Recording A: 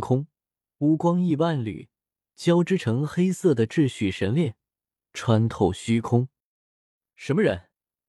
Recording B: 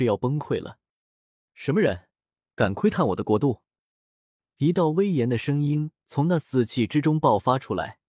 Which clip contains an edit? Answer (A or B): B